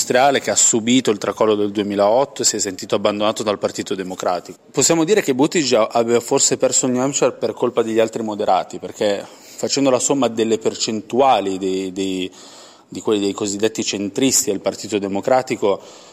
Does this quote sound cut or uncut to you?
cut